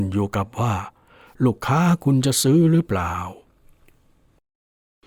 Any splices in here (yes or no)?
no